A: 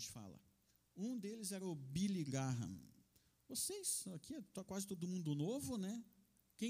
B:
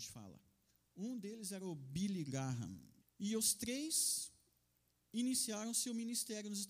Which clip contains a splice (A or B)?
B